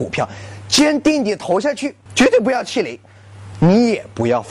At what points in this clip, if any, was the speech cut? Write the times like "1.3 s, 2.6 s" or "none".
2.1 s, 3.5 s